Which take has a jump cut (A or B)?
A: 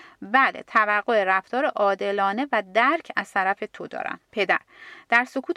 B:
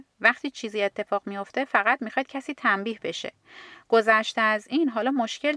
A